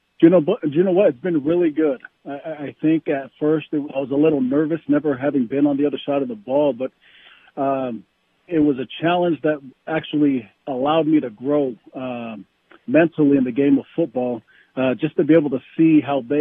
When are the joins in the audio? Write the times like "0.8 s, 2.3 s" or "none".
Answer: 3.9 s, 8.5 s